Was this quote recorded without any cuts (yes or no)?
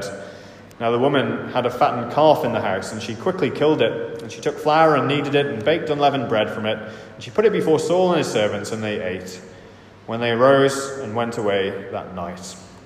yes